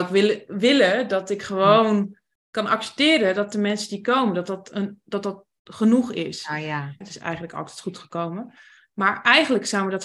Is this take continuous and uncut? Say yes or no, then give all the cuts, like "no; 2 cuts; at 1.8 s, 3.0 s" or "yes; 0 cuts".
no; 2 cuts; at 7.0 s, 8.8 s